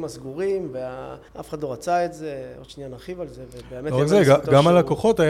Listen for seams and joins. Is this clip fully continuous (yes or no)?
no